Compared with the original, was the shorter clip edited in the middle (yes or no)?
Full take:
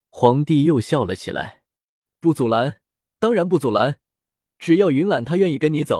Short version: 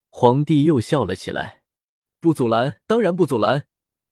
yes